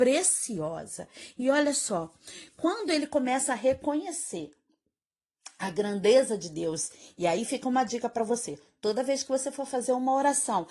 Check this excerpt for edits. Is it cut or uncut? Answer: uncut